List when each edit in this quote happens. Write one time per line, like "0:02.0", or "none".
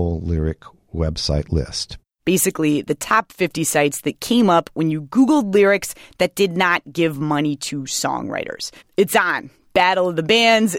0:08.8